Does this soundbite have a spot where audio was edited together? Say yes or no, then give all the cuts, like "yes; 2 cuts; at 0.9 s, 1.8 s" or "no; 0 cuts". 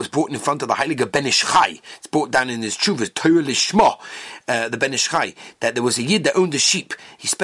no; 0 cuts